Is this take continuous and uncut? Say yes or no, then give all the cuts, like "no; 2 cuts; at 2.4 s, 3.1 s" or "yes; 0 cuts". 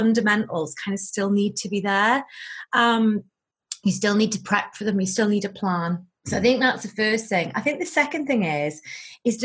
yes; 0 cuts